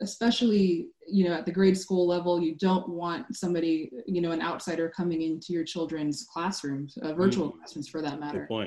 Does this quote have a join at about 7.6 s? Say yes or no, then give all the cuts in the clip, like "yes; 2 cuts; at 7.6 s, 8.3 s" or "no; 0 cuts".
no; 0 cuts